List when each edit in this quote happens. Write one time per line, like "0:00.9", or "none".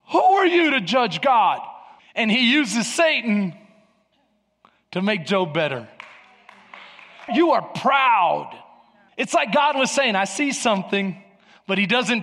0:02.0
0:07.3
0:09.1

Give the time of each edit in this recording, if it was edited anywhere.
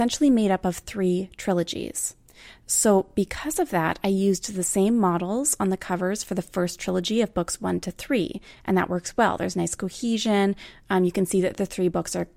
none

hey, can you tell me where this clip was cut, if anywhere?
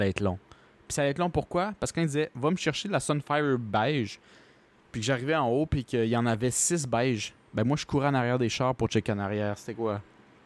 none

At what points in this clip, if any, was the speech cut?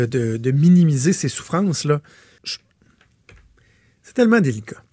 0:02.4

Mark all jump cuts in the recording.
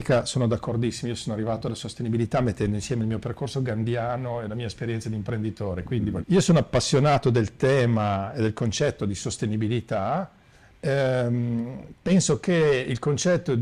0:06.2

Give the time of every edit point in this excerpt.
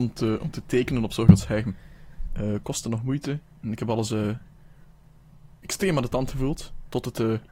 0:02.3

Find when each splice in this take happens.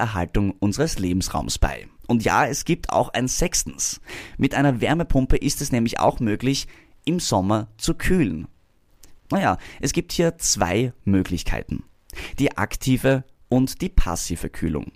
0:02.0
0:09.2

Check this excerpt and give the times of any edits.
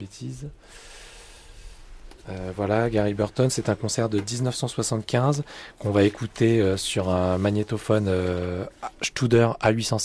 none

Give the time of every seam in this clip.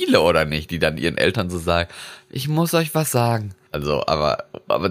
0:03.7

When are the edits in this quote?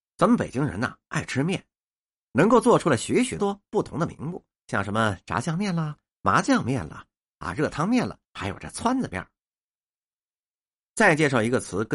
0:03.4
0:08.2

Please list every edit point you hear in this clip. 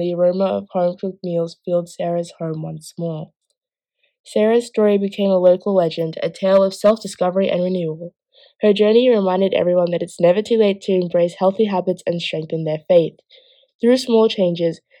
none

